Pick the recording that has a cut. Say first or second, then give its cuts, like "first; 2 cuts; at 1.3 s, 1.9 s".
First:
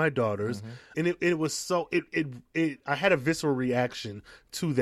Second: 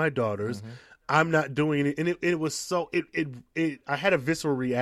first; 1 cut; at 0.9 s